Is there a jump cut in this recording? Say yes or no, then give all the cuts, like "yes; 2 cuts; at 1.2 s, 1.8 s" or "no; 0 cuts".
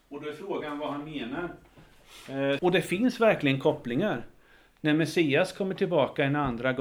yes; 1 cut; at 2.6 s